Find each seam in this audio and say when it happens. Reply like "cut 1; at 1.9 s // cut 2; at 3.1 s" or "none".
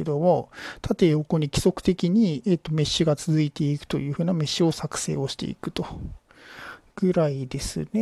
cut 1; at 6.9 s